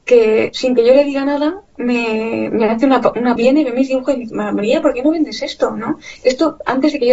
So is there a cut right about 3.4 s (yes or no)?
yes